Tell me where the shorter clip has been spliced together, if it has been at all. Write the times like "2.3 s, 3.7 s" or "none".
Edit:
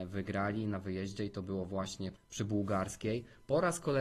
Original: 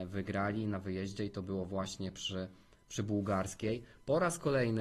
2.1 s

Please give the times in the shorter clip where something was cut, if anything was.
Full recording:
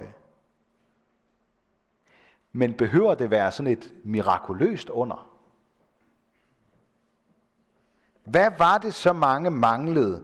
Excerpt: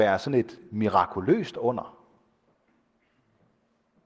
none

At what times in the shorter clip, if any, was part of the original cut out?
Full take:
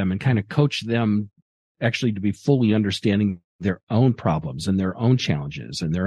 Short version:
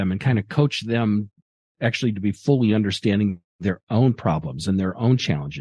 none

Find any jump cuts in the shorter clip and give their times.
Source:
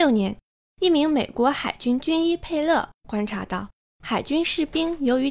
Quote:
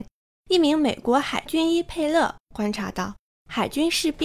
1.4 s

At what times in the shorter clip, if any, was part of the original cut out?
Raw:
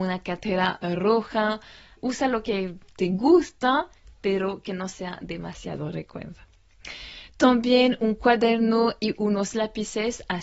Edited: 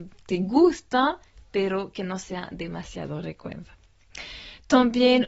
none

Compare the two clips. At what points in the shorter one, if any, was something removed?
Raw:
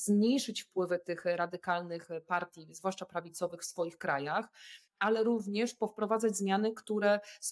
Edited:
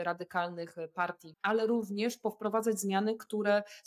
1.3 s

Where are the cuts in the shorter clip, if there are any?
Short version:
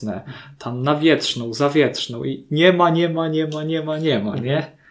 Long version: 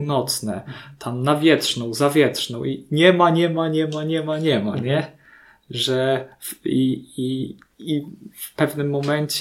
none

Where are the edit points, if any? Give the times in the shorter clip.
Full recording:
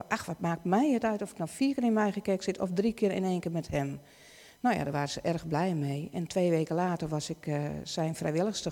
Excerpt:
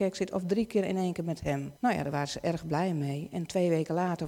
1.8 s

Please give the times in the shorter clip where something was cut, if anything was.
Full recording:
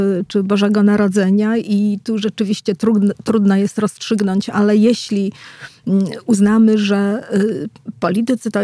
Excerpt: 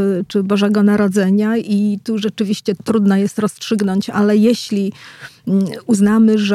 2.8 s

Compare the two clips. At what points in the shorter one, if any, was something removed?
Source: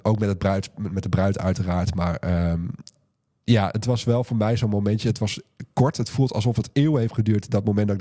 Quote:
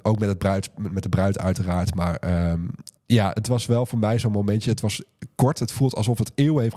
3.0 s

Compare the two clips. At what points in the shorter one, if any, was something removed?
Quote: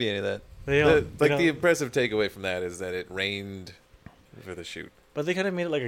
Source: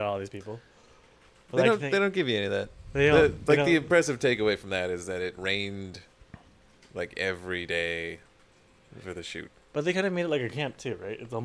4.2 s

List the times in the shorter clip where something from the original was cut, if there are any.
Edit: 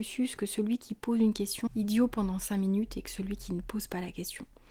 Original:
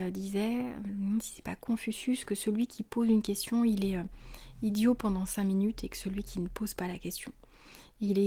1.7 s

